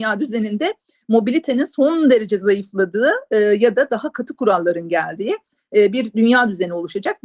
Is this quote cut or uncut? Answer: uncut